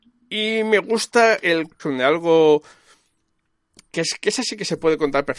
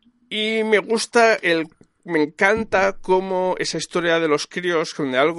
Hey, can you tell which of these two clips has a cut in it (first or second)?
first